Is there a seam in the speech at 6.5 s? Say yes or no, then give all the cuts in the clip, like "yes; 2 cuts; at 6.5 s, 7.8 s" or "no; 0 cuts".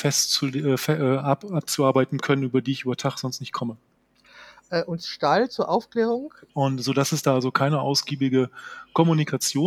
yes; 1 cut; at 6.5 s